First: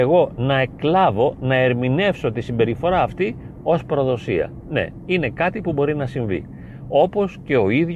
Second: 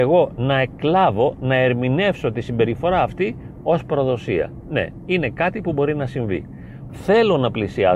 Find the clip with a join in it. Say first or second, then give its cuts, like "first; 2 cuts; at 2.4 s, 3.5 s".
second; 1 cut; at 6.9 s